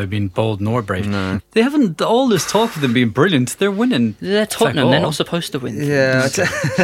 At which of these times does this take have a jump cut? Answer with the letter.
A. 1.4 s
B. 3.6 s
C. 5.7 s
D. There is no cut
A